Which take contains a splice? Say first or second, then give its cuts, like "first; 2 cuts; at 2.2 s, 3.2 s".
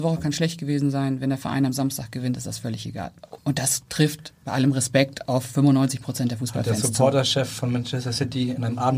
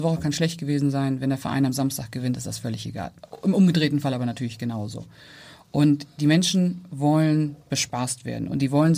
first; 1 cut; at 3.4 s